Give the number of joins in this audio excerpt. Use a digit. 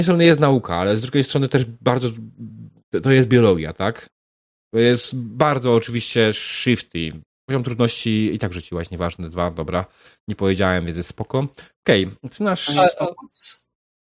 1